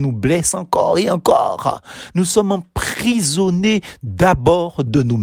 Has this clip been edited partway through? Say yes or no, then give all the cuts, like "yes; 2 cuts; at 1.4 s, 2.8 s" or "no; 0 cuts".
yes; 1 cut; at 2.1 s